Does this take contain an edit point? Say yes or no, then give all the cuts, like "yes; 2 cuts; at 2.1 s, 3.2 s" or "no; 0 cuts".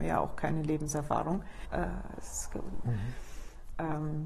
yes; 2 cuts; at 1.6 s, 2.8 s